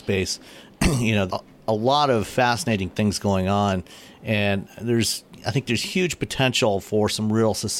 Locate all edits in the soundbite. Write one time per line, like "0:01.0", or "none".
0:01.3